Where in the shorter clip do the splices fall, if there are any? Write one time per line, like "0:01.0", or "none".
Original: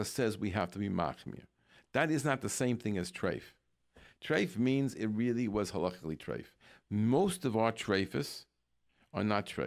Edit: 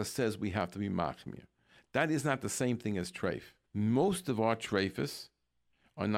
0:03.6